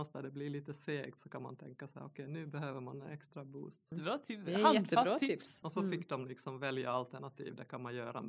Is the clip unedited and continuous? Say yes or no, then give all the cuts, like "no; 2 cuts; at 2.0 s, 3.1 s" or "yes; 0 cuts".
no; 2 cuts; at 3.9 s, 5.6 s